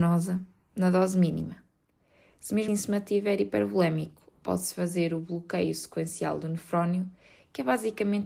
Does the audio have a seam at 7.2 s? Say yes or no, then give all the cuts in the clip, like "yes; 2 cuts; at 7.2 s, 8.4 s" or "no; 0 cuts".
no; 1 cut; at 2.7 s